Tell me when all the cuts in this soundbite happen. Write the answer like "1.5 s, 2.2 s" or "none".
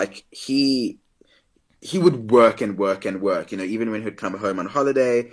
none